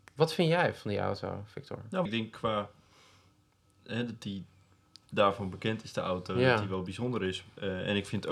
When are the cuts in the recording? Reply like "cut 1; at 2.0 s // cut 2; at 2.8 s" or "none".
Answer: cut 1; at 2.1 s